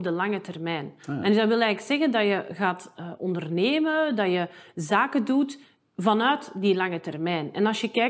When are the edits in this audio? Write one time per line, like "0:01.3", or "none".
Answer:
none